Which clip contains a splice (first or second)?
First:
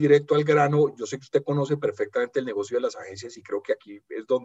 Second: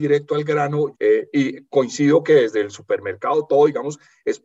second